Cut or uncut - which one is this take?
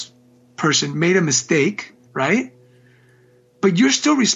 cut